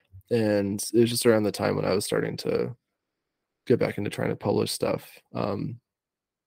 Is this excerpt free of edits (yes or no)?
yes